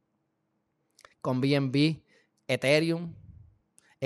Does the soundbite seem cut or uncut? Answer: cut